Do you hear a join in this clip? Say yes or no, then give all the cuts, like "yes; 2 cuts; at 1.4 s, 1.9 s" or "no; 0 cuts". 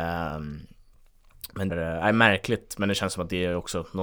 yes; 1 cut; at 1.7 s